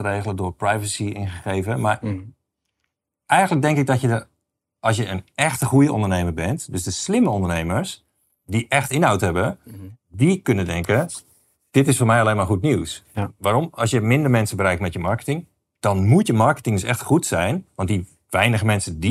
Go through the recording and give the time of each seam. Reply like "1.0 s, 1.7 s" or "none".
none